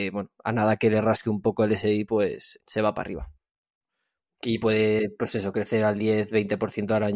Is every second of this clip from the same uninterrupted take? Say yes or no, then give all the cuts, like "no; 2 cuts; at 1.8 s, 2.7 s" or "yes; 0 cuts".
no; 1 cut; at 2.6 s